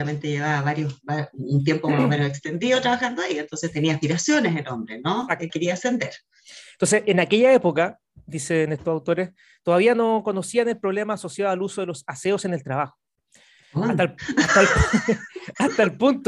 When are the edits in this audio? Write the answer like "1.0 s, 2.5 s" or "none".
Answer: 5.5 s, 13.6 s